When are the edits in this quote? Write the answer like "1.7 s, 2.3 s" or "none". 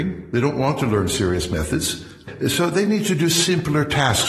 none

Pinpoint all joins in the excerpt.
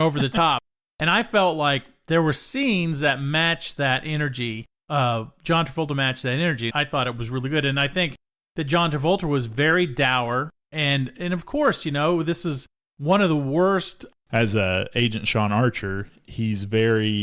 6.7 s, 14.3 s

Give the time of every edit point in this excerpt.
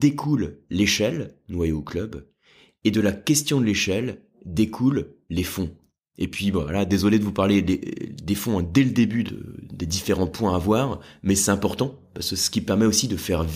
9.3 s

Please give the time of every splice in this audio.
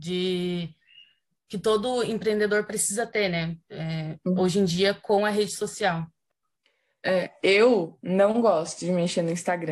none

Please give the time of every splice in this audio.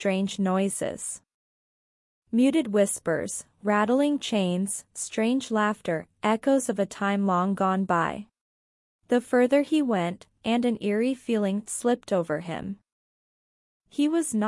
8.9 s, 10.4 s

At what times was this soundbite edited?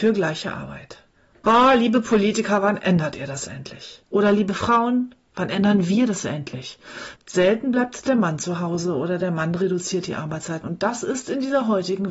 4.1 s, 7.2 s, 10.6 s

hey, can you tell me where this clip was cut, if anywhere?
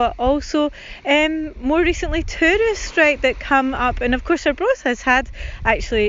none

